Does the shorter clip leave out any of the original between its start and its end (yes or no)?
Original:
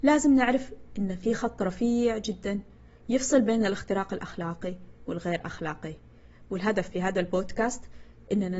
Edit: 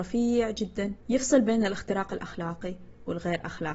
yes